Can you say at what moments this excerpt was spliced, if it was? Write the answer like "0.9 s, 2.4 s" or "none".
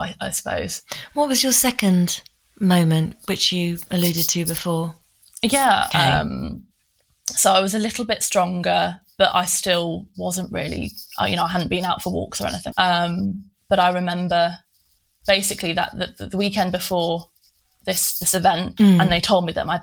5.9 s, 12.7 s, 18.8 s